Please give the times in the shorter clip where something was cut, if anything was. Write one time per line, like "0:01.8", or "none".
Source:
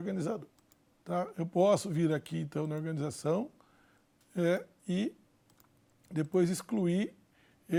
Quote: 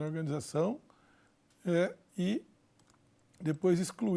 none

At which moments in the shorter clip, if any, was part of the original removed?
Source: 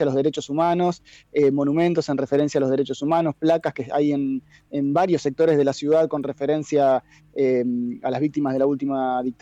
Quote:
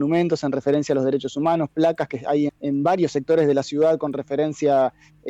0:02.5

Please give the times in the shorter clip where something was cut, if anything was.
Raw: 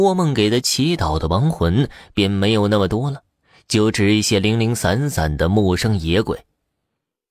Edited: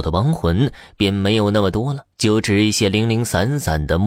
0:02.1

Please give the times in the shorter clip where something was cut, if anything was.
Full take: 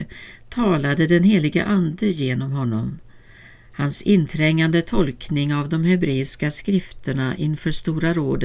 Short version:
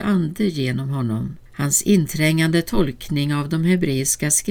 0:01.5

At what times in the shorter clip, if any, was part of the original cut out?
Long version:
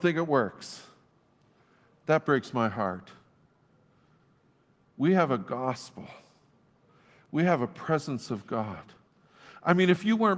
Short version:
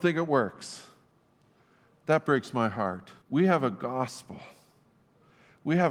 0:03.2

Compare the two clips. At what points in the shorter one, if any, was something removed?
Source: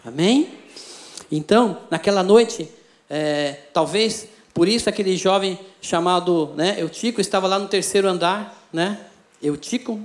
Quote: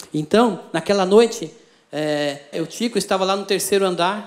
0:02.5

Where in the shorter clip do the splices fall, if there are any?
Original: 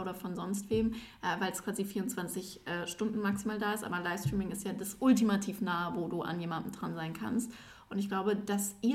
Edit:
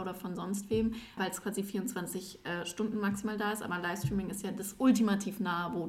0:01.2

